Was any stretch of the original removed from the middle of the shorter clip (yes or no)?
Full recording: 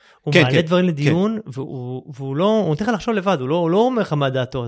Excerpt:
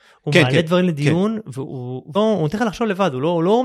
yes